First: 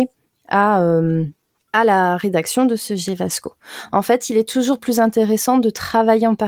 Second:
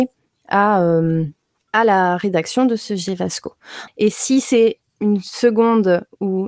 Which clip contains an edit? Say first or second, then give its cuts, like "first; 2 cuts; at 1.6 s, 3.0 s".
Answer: second; 1 cut; at 3.9 s